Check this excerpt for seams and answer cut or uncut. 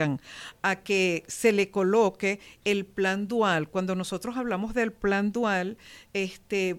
uncut